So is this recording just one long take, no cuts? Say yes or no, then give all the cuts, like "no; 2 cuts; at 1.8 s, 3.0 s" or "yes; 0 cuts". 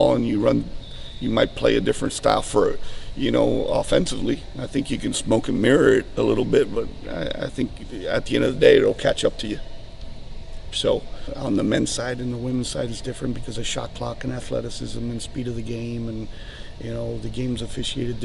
yes; 0 cuts